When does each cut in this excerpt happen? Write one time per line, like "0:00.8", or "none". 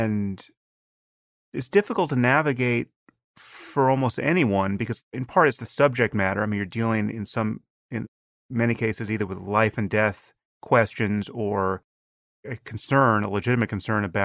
none